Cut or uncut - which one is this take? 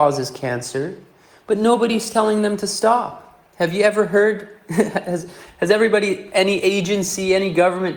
cut